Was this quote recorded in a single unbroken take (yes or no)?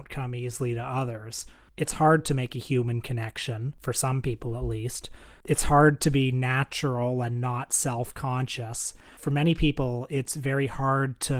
yes